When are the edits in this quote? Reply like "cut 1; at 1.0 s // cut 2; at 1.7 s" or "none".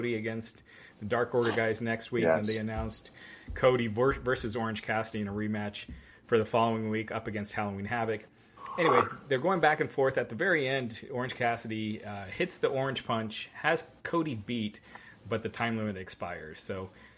none